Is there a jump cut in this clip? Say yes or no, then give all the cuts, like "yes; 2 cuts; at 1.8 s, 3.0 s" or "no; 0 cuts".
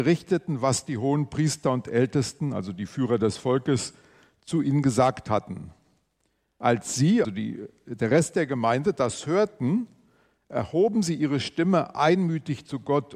yes; 1 cut; at 7.2 s